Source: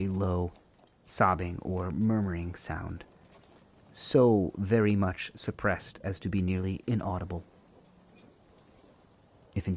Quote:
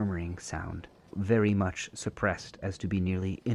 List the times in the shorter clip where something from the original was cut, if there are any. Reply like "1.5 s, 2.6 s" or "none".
1.1 s